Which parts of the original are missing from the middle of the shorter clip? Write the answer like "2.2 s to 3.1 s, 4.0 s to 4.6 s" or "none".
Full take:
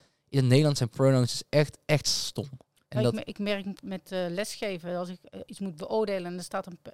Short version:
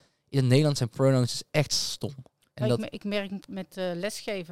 1.5 s to 1.8 s